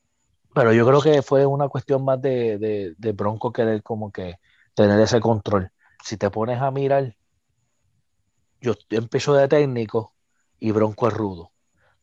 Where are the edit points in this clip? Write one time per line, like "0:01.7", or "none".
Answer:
0:06.0